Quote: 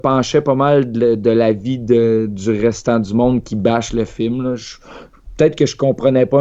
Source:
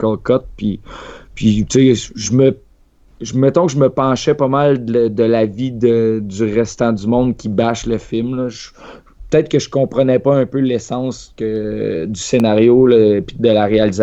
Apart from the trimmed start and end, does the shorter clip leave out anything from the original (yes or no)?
no